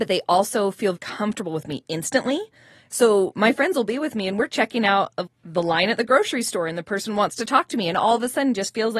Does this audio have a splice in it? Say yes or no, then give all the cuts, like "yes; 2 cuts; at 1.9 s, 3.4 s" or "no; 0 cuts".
yes; 2 cuts; at 0.9 s, 5.3 s